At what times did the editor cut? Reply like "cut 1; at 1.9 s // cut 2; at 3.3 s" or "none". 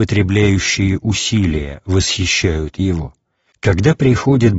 cut 1; at 3.5 s